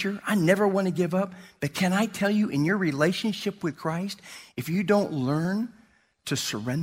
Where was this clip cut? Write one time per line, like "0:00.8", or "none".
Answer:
none